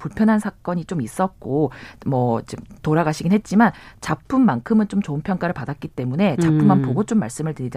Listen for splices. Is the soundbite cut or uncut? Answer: uncut